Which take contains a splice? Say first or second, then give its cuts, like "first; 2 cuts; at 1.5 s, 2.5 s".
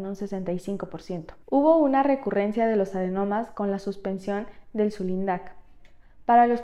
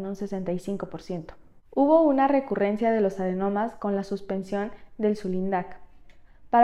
first; 1 cut; at 1.4 s